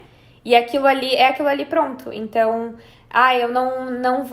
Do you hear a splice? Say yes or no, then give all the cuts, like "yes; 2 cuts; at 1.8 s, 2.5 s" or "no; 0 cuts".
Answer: no; 0 cuts